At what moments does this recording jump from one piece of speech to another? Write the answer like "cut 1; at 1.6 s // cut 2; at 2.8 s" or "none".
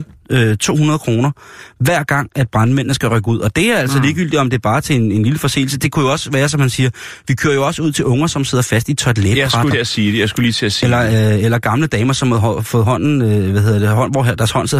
cut 1; at 9.7 s

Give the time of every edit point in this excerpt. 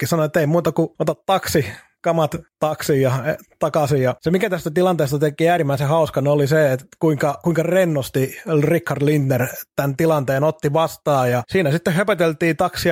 none

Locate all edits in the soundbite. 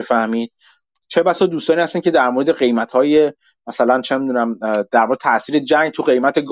none

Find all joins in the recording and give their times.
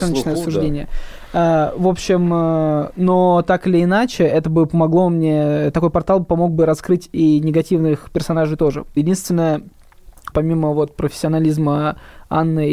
cut 1; at 9.0 s // cut 2; at 10.3 s

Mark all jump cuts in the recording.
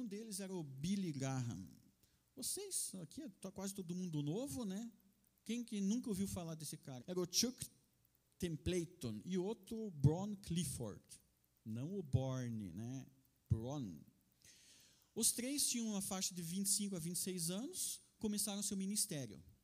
cut 1; at 7.0 s

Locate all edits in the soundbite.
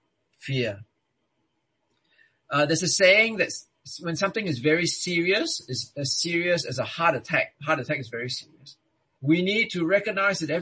cut 1; at 7.5 s // cut 2; at 9.2 s

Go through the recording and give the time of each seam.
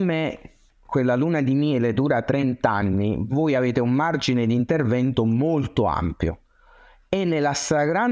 none

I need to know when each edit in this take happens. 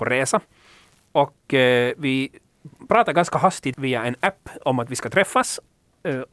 cut 1; at 3.7 s

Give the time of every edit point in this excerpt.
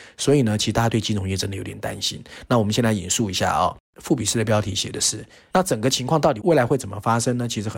cut 1; at 2.5 s // cut 2; at 5.5 s

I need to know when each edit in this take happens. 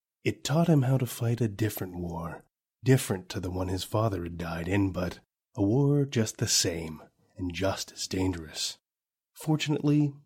cut 1; at 9.1 s

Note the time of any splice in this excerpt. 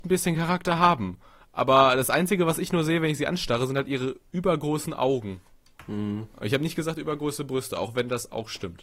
none

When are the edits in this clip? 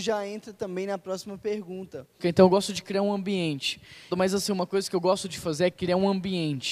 cut 1; at 2.2 s // cut 2; at 4.1 s

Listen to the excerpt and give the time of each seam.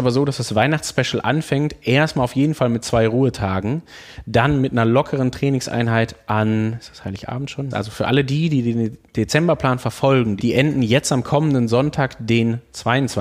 cut 1; at 7.7 s // cut 2; at 10.4 s

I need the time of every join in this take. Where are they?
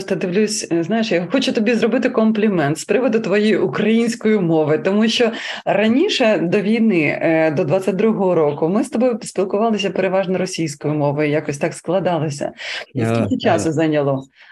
cut 1; at 12.9 s

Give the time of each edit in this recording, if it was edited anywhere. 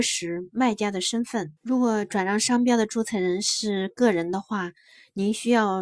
cut 1; at 1.6 s

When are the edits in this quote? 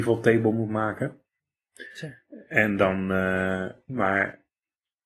cut 1; at 3.9 s

